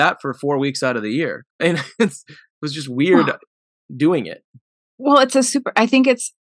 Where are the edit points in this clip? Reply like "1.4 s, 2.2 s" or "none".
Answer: 1.5 s